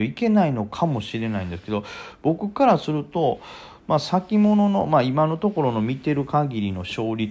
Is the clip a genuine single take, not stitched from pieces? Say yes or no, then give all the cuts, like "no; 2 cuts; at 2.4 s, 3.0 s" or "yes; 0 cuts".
yes; 0 cuts